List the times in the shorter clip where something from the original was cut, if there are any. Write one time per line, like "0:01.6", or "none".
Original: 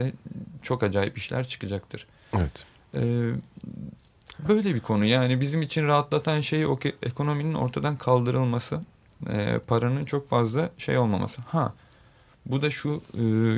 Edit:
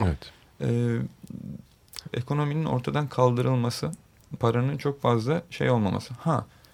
0:02.1
0:04.4